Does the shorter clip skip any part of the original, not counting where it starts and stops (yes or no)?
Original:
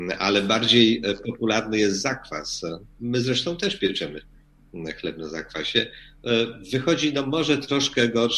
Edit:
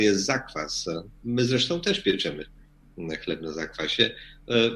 no